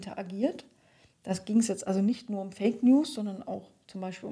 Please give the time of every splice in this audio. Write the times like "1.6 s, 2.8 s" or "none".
none